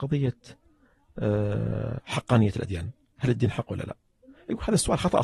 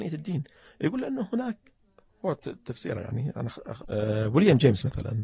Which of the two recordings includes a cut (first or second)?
second